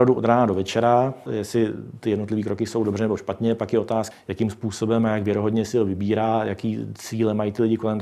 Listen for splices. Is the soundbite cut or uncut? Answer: cut